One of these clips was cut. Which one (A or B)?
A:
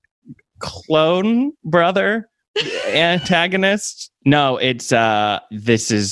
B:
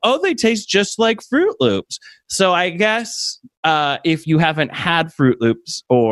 A